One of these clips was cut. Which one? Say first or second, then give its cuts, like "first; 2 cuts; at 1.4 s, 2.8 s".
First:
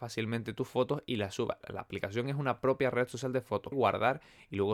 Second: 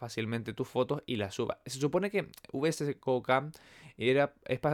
first; 2 cuts; at 1.6 s, 3.7 s